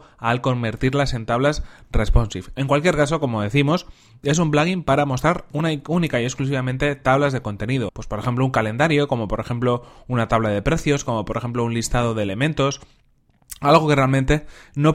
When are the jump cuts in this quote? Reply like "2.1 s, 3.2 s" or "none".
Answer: 7.9 s